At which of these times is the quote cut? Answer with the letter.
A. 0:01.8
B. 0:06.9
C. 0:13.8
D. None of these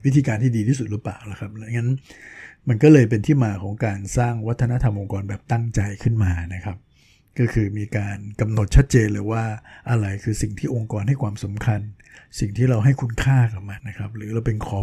C